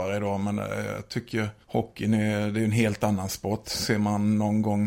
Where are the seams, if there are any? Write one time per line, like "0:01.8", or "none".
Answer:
0:01.6